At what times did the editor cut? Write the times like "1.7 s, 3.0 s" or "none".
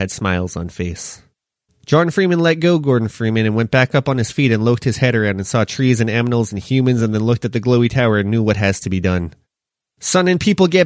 none